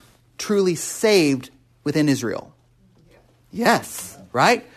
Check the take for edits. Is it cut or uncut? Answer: uncut